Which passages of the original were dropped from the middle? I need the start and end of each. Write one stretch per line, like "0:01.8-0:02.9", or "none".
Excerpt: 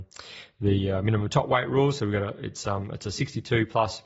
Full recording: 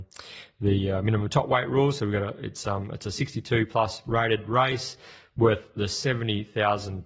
none